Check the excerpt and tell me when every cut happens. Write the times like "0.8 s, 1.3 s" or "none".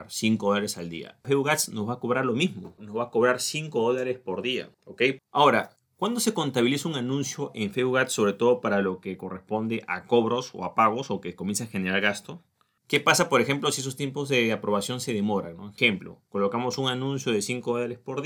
1.2 s, 5.2 s, 12.8 s